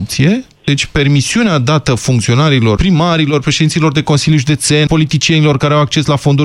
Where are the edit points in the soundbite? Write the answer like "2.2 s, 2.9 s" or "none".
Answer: 2.8 s, 4.9 s